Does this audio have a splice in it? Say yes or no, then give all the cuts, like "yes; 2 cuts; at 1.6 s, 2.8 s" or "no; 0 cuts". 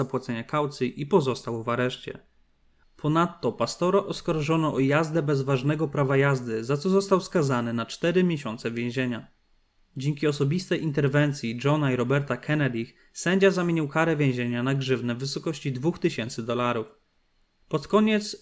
yes; 2 cuts; at 2.8 s, 9.9 s